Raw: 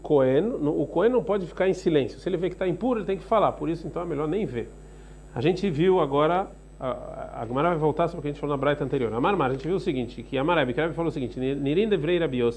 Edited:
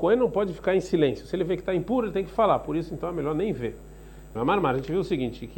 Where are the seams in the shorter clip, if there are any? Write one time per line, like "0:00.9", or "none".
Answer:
0:04.4